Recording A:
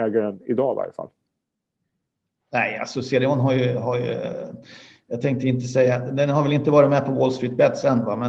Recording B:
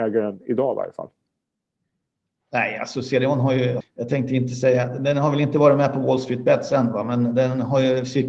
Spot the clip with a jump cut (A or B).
B